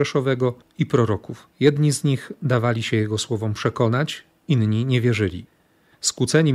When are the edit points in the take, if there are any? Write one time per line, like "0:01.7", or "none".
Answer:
0:01.5